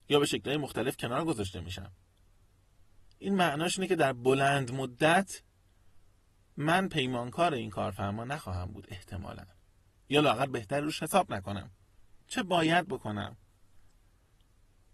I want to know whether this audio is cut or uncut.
cut